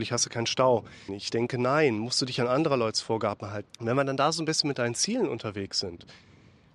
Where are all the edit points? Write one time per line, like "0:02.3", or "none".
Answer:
0:01.1
0:03.7